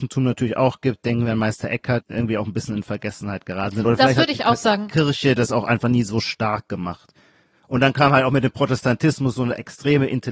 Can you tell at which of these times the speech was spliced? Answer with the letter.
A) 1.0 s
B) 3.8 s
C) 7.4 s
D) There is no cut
D